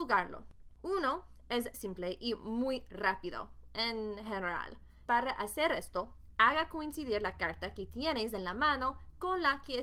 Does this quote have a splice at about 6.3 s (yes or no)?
no